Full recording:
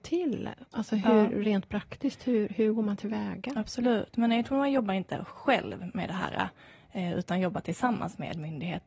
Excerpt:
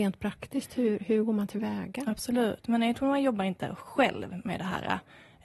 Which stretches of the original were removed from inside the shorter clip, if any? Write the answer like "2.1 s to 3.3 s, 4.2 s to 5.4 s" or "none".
none